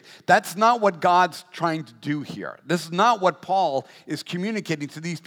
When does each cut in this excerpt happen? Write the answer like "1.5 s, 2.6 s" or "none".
none